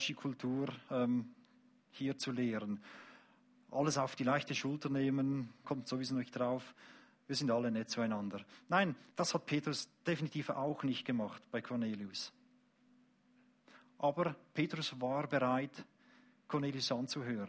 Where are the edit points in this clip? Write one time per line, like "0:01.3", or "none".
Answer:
0:05.6
0:09.1